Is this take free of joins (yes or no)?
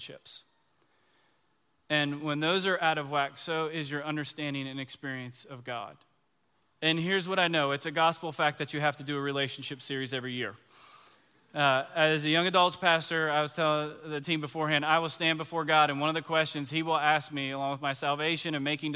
no